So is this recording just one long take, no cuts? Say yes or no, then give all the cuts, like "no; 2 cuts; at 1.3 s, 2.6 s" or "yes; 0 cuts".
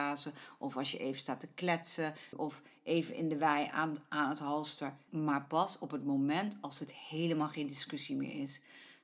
no; 2 cuts; at 2.3 s, 5.1 s